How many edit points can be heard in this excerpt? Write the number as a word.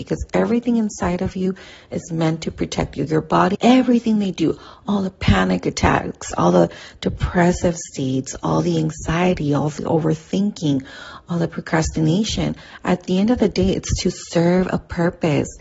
one